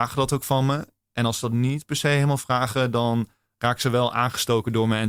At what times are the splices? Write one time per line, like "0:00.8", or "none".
none